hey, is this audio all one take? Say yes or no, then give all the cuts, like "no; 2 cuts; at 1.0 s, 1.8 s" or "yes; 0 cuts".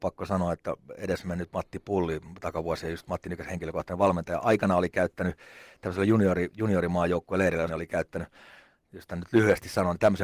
no; 1 cut; at 7.7 s